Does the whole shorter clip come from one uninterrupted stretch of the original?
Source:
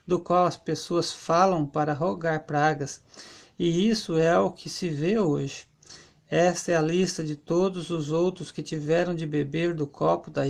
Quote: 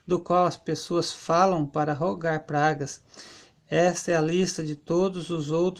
no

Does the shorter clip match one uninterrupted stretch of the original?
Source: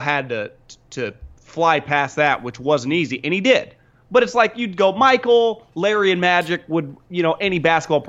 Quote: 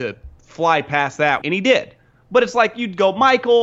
no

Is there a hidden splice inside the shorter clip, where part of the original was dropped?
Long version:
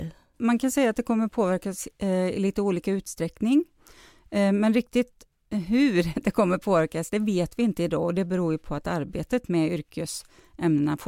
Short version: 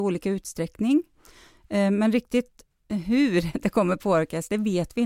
no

